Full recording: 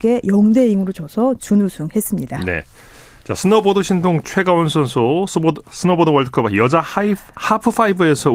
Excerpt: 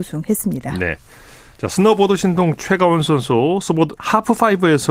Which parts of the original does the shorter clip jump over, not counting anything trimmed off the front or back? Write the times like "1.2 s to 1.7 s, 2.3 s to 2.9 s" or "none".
5.6 s to 7.3 s